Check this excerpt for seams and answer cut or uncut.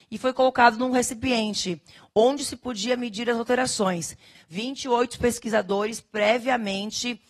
cut